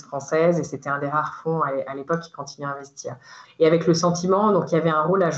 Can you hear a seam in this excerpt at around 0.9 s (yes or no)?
no